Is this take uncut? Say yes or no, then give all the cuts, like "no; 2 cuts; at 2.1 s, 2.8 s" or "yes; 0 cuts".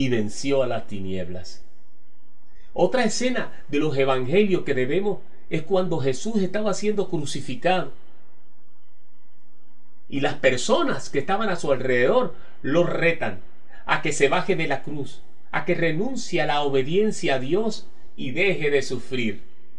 no; 1 cut; at 5.5 s